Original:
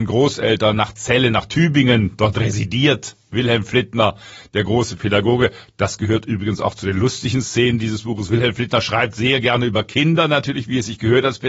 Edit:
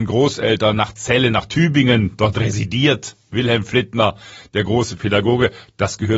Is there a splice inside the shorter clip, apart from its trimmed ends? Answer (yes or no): no